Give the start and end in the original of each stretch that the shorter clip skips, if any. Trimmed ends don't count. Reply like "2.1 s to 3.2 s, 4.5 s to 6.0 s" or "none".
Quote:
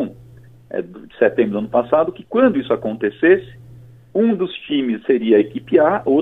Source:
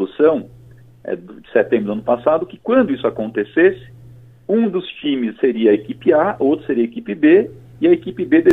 none